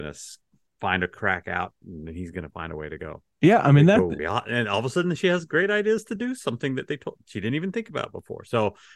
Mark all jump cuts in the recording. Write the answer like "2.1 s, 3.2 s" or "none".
4.2 s